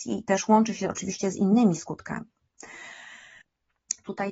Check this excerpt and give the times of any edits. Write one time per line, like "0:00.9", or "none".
0:03.4